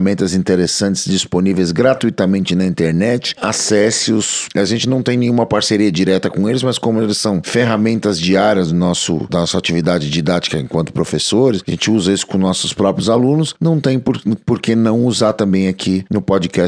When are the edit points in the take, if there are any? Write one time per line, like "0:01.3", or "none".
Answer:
0:03.4